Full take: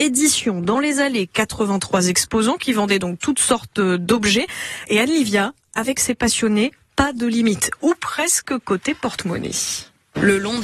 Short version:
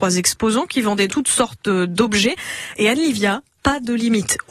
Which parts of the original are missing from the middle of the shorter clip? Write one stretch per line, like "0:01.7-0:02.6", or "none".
0:03.0-0:03.2
0:05.7-0:06.9